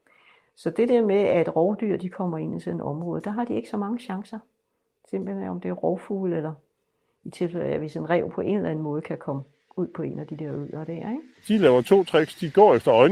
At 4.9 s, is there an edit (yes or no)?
no